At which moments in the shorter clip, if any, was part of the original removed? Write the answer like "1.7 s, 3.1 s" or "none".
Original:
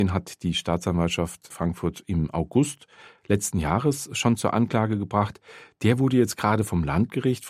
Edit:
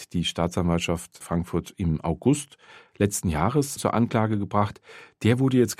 3.8 s

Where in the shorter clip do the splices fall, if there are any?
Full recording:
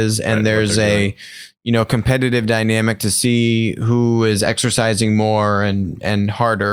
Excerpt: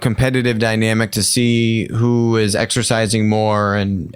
none

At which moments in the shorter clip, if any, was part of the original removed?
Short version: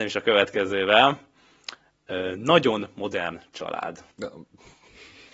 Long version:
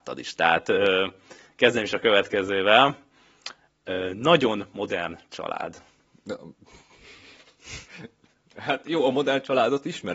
4.1 s

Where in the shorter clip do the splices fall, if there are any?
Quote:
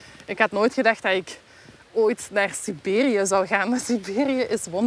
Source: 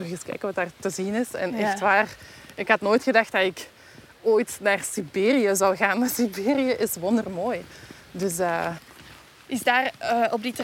none

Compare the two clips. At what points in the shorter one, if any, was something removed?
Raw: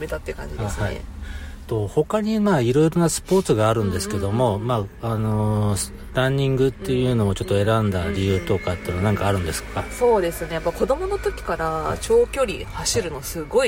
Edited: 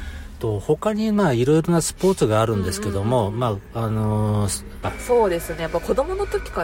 4.8 s

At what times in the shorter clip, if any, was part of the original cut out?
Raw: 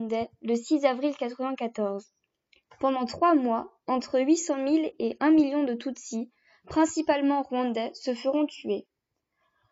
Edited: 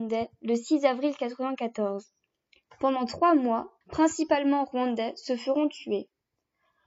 3.8 s

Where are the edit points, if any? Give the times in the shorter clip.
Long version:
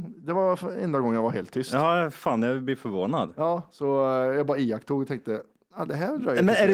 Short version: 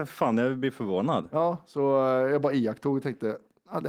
none

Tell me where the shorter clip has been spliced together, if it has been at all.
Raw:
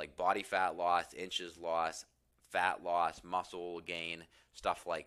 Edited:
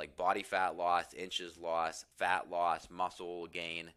2.1 s

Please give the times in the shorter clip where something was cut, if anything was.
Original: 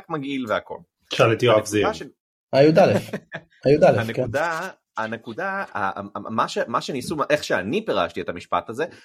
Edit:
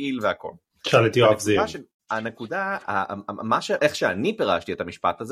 2.0 s, 3.8 s

